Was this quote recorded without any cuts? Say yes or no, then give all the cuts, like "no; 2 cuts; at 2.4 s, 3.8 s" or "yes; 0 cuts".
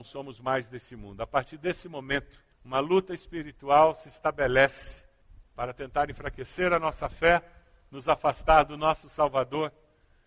yes; 0 cuts